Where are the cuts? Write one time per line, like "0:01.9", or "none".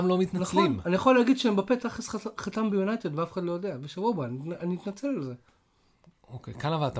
none